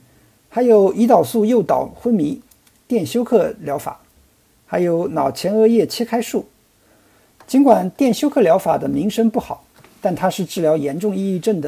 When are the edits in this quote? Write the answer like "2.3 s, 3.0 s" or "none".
none